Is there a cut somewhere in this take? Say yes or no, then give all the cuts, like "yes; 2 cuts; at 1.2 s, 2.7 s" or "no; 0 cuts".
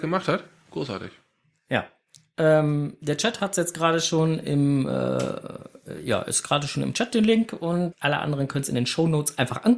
yes; 1 cut; at 7.9 s